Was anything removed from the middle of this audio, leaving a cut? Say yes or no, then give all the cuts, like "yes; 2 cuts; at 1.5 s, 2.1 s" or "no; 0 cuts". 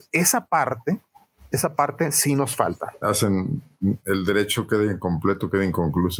yes; 1 cut; at 3.0 s